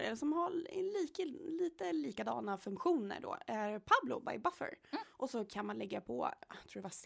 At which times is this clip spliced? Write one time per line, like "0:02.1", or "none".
0:05.0